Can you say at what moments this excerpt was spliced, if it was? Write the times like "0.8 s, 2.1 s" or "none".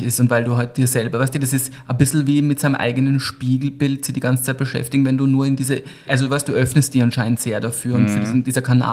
6.1 s